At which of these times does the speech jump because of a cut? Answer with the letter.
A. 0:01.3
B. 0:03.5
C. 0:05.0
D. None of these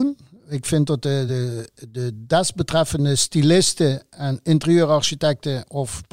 D